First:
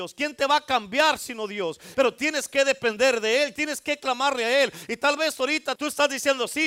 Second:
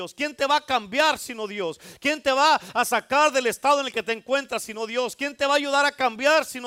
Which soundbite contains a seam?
first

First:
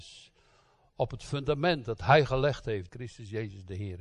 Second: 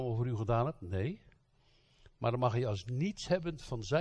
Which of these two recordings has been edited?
first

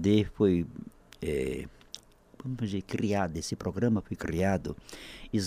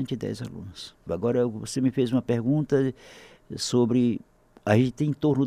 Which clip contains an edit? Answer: second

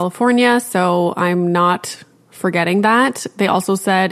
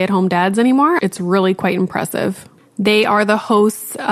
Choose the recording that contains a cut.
second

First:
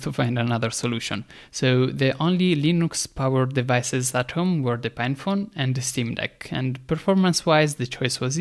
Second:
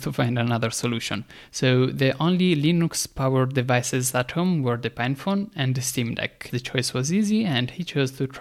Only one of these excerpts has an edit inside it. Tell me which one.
second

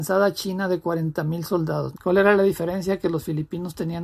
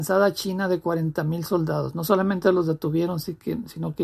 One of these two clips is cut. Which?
first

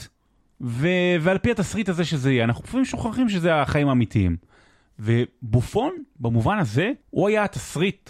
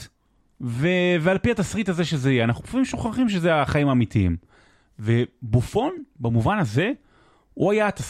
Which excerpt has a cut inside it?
first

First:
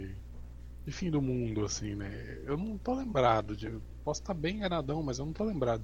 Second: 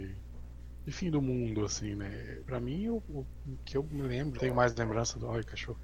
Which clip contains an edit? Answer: second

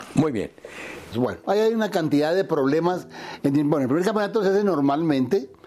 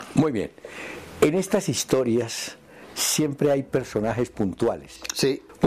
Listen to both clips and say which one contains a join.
first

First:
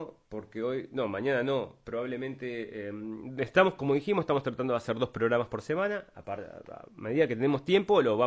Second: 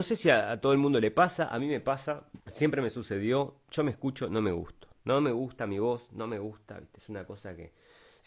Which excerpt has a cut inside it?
second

